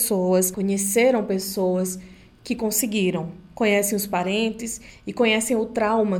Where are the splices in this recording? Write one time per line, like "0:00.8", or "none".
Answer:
none